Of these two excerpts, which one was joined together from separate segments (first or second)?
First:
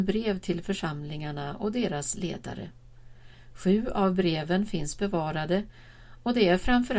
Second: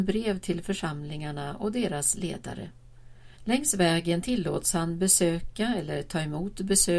second